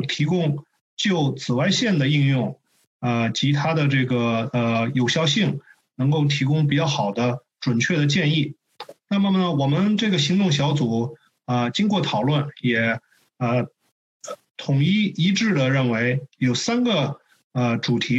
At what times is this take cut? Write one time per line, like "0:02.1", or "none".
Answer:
none